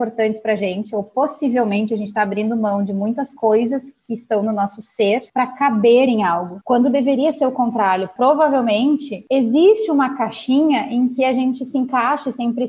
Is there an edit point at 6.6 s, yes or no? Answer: no